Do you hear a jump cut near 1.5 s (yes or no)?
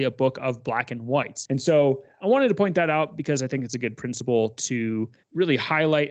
yes